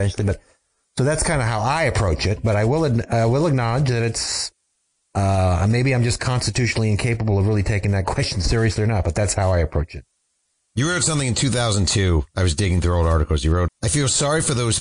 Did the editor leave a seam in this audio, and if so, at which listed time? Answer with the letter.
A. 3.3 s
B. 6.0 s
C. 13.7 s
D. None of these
C